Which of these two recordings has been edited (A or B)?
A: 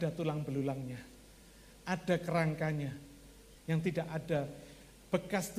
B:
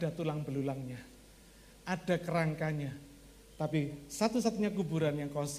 A